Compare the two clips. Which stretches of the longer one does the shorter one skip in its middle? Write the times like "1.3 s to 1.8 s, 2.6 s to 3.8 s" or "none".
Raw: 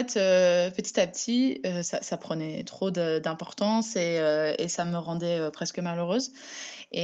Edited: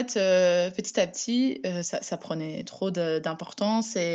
none